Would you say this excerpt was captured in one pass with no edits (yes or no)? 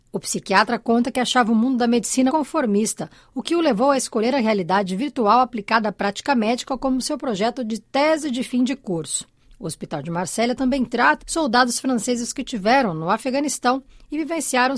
no